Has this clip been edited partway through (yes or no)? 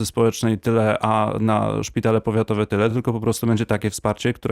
no